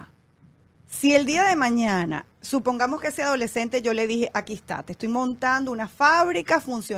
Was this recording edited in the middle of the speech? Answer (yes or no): yes